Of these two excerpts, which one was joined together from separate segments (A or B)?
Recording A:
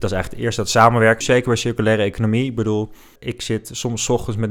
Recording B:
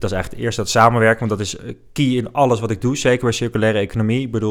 A